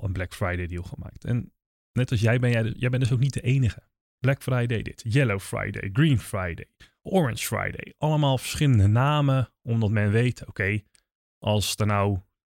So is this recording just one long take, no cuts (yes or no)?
no